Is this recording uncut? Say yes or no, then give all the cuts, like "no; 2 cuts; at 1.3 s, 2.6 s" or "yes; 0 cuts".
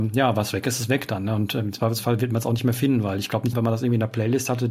no; 1 cut; at 3.5 s